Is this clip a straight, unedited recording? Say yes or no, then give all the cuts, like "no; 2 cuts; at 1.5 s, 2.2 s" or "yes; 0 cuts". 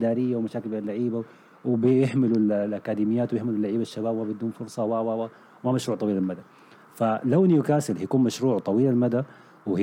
yes; 0 cuts